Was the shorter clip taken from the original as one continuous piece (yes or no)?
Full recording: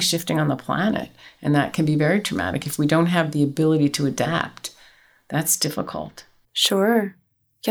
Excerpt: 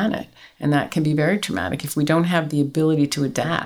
yes